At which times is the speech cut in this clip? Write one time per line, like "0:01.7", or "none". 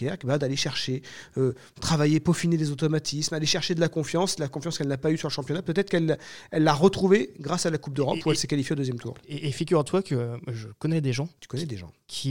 0:11.4